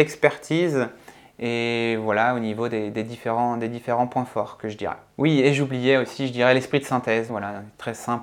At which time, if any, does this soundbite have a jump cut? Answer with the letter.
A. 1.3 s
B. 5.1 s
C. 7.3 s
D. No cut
C